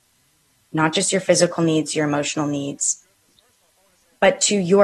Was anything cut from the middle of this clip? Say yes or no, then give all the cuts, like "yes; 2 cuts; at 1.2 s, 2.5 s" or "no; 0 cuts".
no; 0 cuts